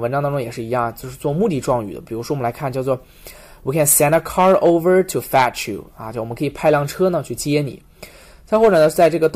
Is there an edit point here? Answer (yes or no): no